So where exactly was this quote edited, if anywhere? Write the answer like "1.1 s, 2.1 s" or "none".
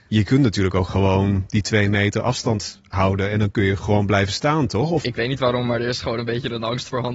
none